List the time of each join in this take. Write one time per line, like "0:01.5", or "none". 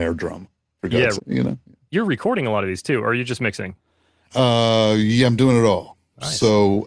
0:01.2